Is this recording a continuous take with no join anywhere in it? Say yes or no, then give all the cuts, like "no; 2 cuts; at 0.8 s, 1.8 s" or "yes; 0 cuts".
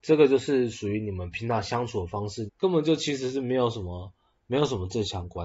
no; 1 cut; at 2.5 s